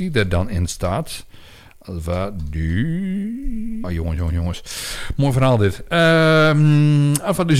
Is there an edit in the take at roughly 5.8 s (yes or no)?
no